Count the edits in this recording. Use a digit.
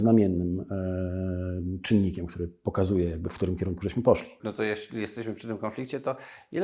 1